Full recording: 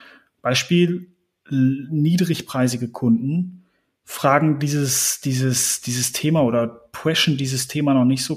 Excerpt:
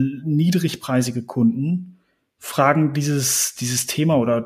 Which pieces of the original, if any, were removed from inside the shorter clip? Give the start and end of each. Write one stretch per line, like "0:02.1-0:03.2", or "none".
0:05.2-0:05.8